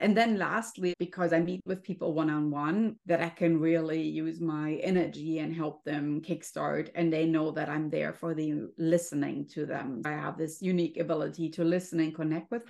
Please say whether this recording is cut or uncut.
cut